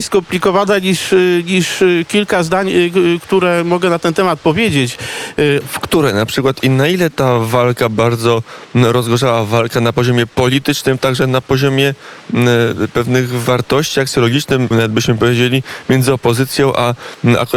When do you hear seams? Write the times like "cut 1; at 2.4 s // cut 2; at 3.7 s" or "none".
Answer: cut 1; at 5.6 s // cut 2; at 14.7 s